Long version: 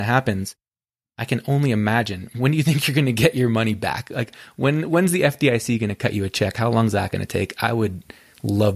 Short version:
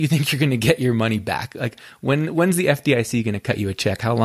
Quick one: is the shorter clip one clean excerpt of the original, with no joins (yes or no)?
yes